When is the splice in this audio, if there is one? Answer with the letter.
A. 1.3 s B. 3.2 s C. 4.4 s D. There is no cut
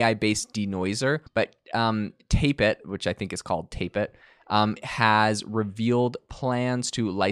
A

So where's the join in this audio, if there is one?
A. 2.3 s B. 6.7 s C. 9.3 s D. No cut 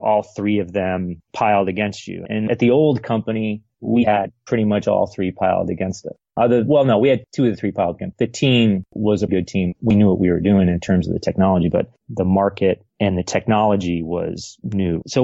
C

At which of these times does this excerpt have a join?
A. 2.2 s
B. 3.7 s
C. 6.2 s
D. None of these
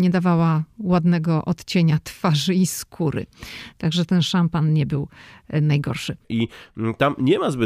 C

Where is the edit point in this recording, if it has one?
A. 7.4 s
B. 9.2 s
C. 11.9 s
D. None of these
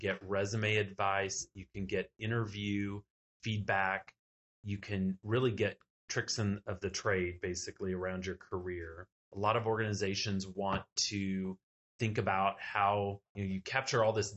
B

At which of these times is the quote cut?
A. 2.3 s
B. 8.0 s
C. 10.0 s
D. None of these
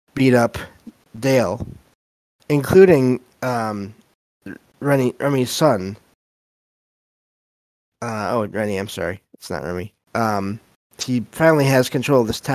C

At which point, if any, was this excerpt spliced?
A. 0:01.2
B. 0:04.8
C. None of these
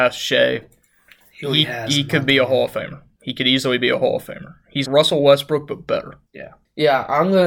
B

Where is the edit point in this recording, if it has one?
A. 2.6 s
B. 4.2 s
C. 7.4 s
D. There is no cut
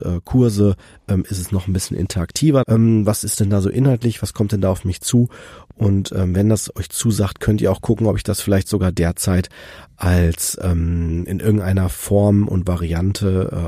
A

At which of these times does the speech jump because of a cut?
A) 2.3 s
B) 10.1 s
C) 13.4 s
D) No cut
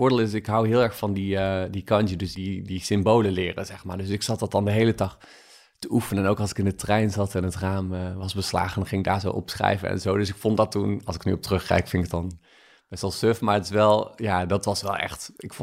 A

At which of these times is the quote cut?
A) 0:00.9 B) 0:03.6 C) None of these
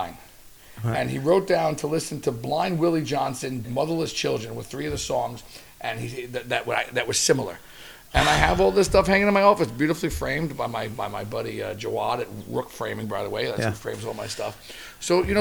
B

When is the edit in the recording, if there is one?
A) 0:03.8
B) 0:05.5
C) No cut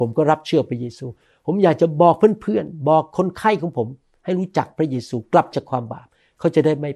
B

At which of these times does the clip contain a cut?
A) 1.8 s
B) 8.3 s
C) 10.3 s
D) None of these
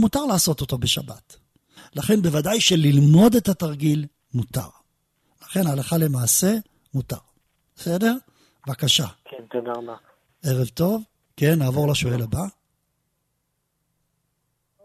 A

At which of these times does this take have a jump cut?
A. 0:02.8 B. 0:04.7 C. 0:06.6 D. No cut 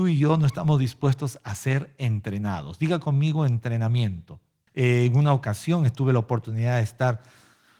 B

